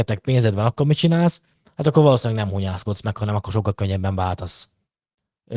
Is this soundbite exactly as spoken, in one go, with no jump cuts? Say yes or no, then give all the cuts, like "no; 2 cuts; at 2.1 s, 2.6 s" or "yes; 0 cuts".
yes; 0 cuts